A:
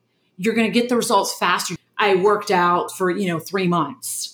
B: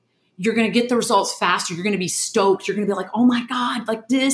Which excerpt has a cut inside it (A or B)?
A